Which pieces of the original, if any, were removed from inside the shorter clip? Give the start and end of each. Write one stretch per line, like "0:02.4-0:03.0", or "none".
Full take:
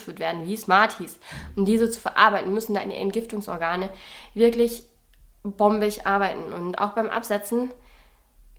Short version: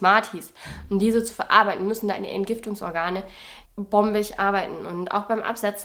0:04.3-0:05.3